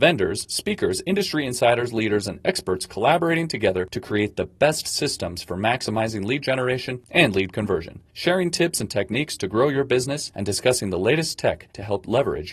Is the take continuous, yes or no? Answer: yes